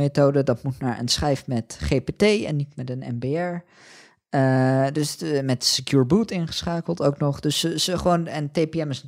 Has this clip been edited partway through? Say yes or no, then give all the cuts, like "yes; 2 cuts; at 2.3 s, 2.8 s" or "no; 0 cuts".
no; 0 cuts